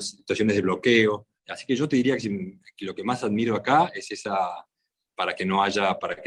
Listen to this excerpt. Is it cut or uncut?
cut